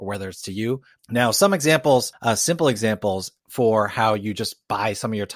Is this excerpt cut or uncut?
cut